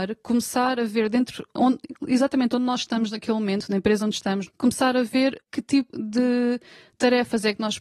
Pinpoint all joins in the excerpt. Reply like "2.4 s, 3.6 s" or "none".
4.5 s, 5.9 s

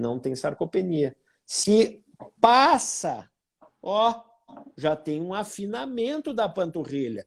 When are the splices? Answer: none

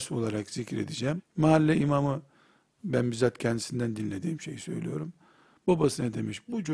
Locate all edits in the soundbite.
1.2 s

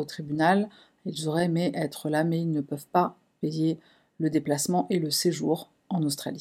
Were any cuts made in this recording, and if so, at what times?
none

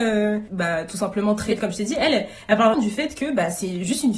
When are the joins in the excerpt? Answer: 1.6 s, 2.7 s

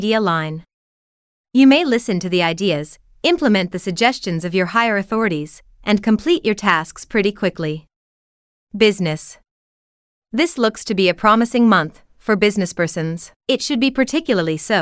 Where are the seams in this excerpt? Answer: 13.4 s

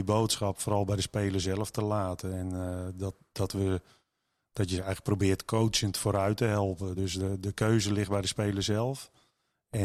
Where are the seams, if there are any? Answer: none

